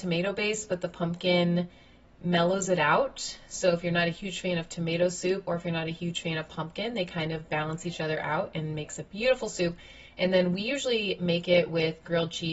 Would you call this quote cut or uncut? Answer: uncut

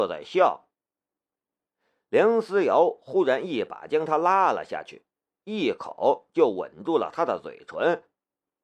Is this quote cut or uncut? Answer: uncut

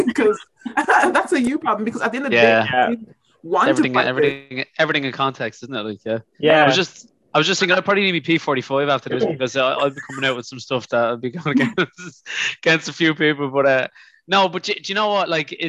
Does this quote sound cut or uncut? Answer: uncut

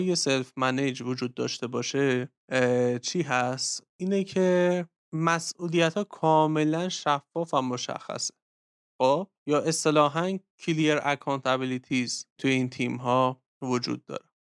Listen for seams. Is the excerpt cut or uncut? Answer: uncut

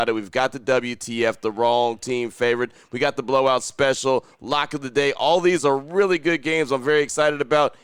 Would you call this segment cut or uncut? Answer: uncut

